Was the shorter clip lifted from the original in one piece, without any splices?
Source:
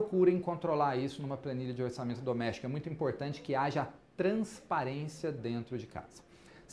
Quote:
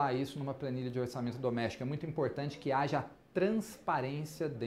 yes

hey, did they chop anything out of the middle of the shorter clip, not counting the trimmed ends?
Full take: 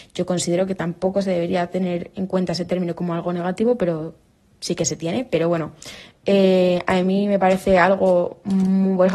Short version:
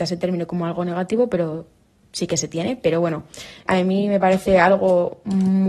yes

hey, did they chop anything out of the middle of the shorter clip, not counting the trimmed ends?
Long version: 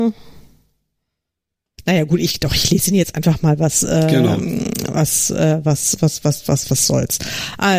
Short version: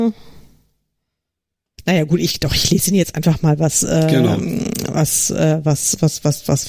no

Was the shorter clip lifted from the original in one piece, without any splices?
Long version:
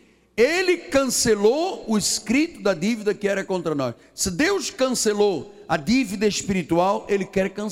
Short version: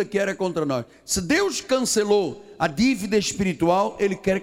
yes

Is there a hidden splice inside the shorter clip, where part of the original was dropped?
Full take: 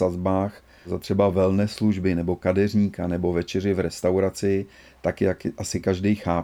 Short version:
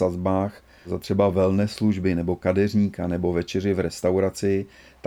no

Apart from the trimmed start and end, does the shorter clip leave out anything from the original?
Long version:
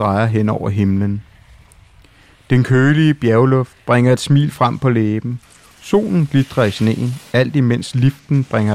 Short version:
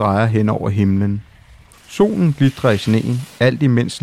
yes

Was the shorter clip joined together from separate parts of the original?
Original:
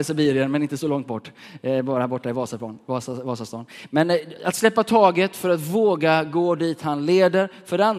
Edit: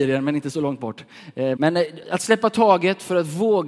yes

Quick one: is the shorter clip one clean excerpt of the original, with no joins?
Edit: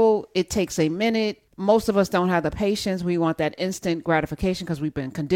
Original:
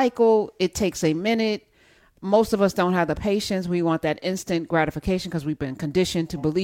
no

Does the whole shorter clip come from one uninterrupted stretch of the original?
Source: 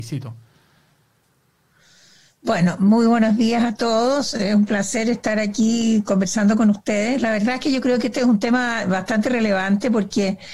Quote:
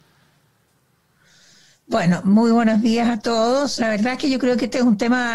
no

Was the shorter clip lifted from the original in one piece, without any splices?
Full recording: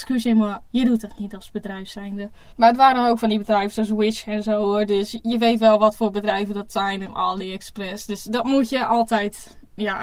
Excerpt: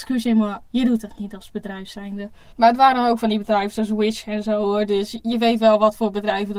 yes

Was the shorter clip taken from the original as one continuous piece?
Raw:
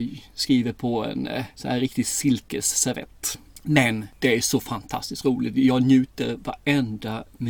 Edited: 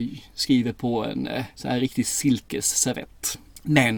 yes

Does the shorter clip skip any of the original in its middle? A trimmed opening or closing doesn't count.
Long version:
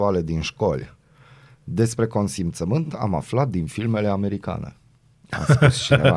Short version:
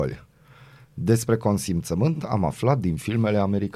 no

